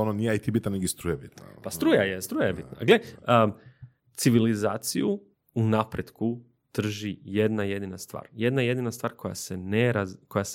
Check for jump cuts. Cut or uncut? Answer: uncut